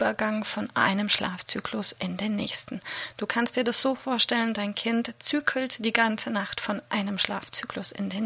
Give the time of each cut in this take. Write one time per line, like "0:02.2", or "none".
none